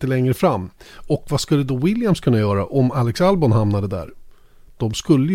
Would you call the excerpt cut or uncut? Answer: uncut